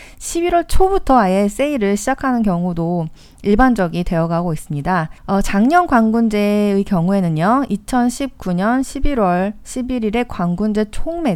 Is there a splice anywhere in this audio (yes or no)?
yes